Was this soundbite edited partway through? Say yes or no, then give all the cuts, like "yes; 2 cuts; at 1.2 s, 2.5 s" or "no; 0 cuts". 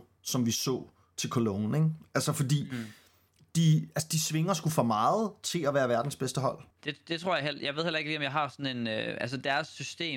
yes; 1 cut; at 6.7 s